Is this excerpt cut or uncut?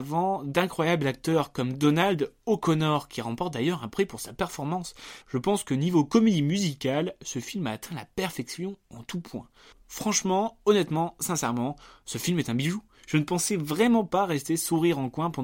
cut